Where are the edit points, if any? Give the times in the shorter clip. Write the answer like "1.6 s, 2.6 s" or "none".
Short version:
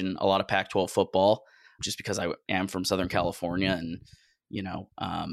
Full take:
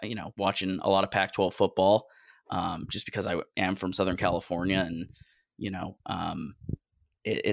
1.8 s

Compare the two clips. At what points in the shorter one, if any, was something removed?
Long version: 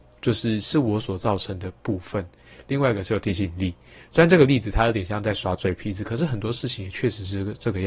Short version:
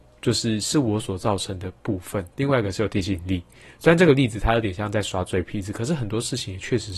2.3 s

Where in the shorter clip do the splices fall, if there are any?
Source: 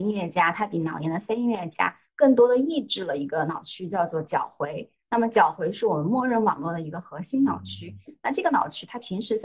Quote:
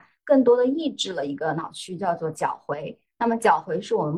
none

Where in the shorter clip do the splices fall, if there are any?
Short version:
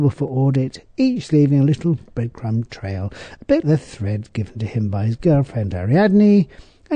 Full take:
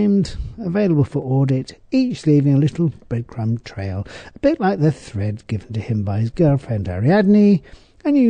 3.6 s

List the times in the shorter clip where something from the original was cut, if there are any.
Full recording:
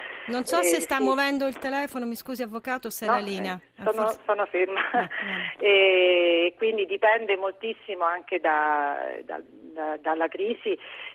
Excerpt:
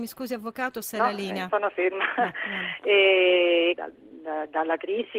1.5 s, 3.7 s

